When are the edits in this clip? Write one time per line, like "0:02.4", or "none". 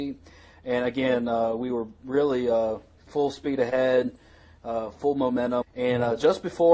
0:05.6